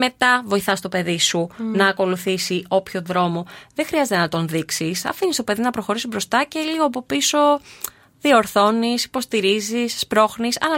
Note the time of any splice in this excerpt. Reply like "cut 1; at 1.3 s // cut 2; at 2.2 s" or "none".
none

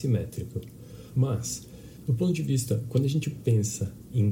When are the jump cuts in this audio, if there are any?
cut 1; at 1.1 s

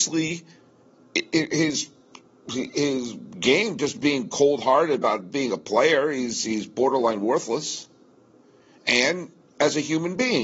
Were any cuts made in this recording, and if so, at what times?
none

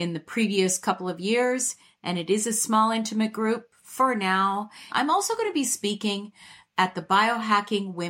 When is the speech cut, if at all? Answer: cut 1; at 4.9 s

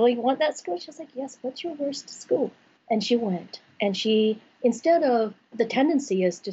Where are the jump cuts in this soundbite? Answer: cut 1; at 2.8 s // cut 2; at 5.5 s

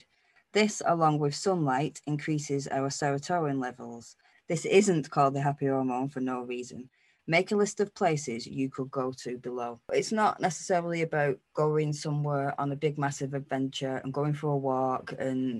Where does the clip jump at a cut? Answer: none

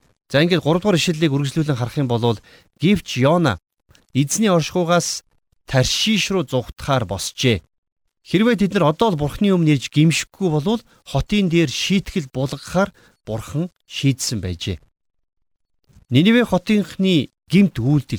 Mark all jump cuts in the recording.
cut 1; at 8.1 s // cut 2; at 16.0 s

